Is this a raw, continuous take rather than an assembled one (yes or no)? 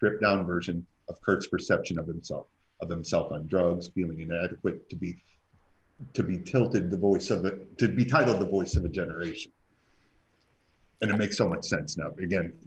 no